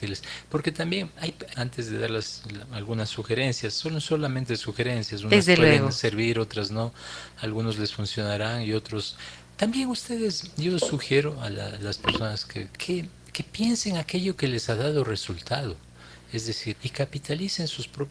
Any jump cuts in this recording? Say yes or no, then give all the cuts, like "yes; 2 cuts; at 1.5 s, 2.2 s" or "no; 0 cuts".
yes; 3 cuts; at 1.5 s, 12.7 s, 16.7 s